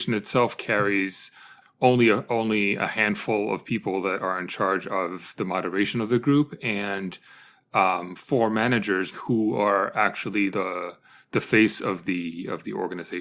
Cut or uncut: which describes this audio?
cut